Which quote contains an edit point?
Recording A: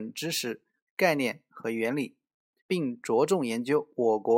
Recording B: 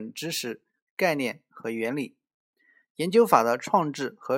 A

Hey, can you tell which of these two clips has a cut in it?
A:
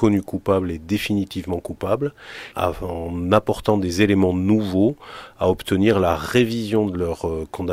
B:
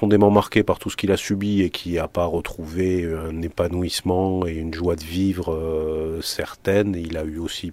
A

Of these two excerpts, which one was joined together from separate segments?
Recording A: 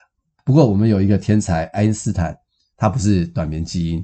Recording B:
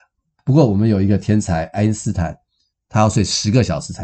B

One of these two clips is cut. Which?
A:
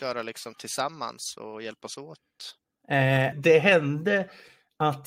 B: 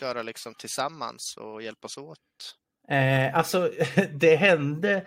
A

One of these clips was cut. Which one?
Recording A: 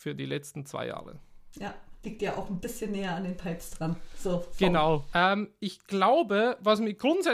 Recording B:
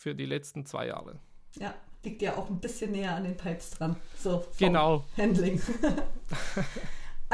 A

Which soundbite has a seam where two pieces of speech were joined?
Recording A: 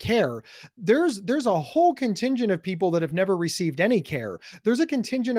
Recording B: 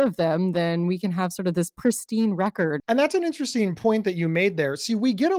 B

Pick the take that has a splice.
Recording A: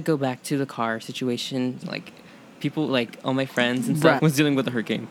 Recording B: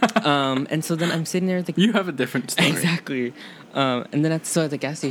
A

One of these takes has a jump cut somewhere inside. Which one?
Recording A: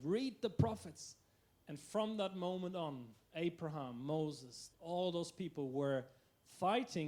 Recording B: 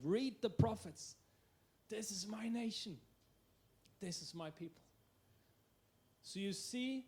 A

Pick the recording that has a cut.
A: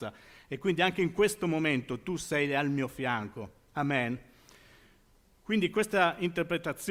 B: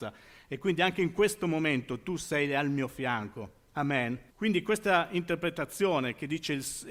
B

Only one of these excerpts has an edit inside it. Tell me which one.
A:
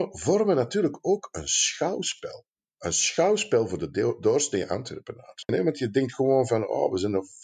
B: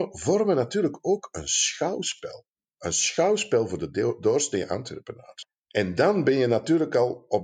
A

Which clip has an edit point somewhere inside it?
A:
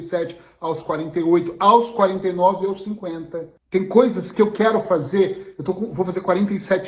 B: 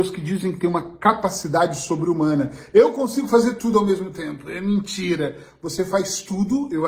A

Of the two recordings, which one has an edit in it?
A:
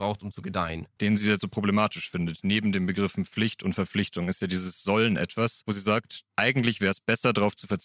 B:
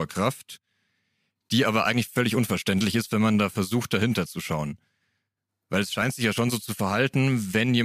A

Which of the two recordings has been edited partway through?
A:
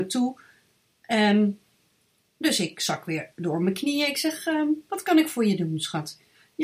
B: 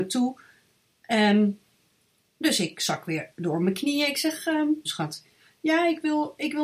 B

